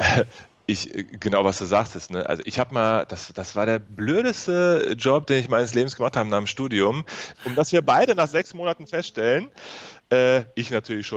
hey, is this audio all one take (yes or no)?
no